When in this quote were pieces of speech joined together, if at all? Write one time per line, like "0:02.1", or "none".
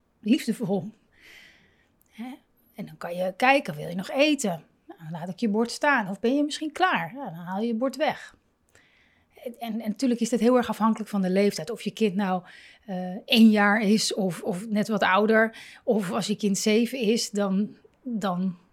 none